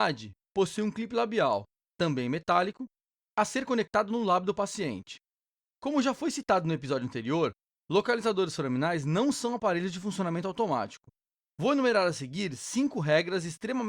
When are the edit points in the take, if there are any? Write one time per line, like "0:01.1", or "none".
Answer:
0:11.4